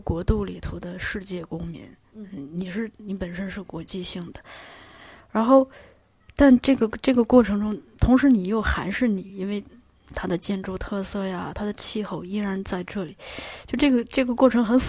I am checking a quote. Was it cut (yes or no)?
no